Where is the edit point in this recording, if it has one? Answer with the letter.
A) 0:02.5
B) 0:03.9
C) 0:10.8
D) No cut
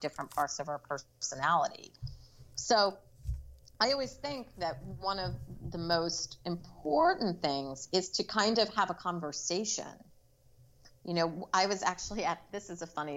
D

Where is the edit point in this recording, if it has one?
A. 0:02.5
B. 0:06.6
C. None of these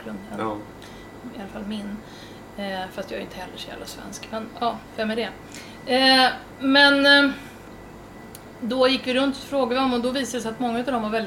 C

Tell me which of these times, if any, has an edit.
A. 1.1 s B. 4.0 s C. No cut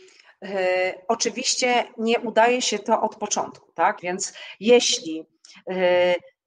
B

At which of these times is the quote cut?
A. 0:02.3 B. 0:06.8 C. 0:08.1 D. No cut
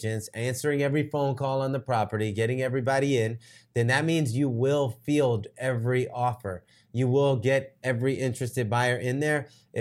D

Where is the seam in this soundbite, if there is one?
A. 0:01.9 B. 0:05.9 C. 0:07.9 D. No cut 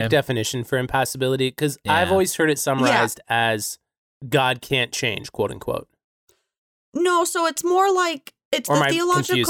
D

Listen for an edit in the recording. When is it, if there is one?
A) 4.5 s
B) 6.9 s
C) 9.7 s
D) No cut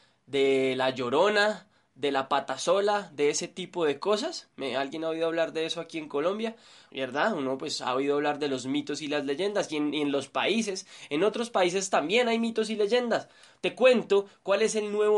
B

